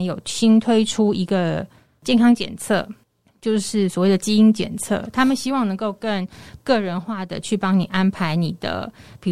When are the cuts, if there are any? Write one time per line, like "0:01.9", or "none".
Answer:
none

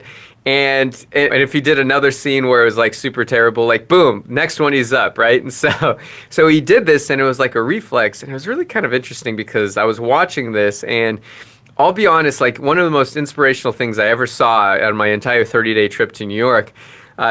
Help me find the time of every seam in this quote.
0:01.3

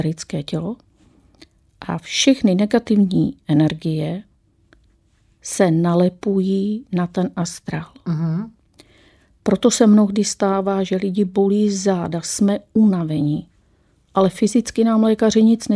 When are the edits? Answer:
none

